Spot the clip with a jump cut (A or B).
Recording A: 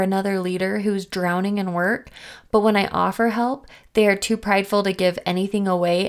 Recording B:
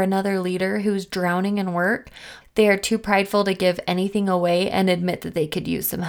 B